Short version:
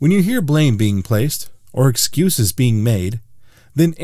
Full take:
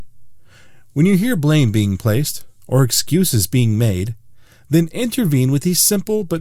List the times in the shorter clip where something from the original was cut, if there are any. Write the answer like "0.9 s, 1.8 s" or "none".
none